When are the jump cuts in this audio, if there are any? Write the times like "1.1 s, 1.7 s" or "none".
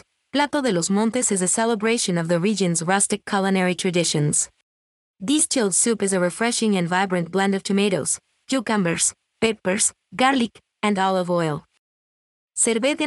5.1 s